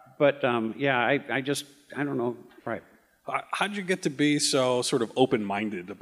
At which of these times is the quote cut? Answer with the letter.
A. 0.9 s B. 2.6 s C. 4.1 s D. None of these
B